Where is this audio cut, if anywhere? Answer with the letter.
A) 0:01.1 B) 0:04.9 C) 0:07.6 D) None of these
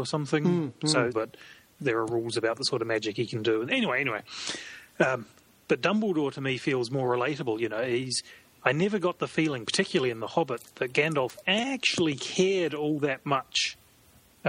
A